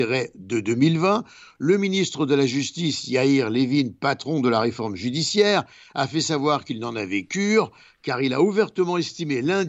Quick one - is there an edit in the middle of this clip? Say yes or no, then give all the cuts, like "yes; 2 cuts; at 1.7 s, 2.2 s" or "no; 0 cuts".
no; 0 cuts